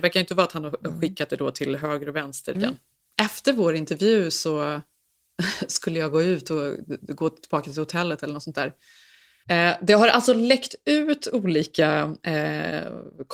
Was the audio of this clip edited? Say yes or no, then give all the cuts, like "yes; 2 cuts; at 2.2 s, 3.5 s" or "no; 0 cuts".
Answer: yes; 2 cuts; at 2.5 s, 9.4 s